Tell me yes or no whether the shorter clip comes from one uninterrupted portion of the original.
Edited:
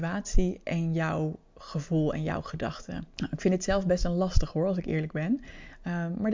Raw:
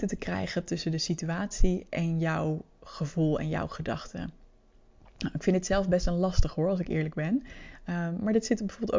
no